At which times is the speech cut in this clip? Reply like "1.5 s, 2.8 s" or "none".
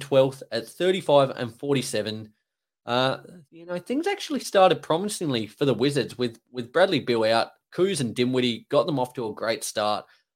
3.4 s